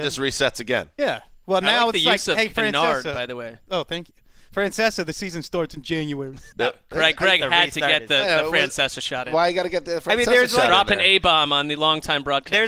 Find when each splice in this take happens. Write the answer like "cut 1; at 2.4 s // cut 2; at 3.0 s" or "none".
cut 1; at 6.5 s